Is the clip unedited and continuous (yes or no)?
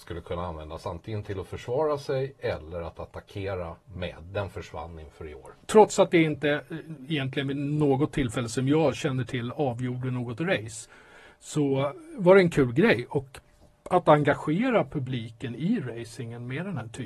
yes